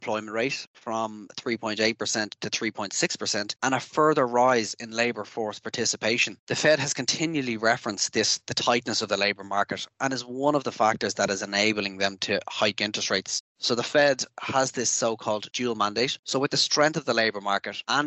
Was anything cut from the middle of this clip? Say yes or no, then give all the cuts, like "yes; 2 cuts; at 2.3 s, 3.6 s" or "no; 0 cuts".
yes; 1 cut; at 16.2 s